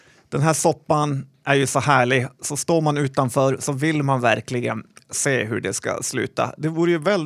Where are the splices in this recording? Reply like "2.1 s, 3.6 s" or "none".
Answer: none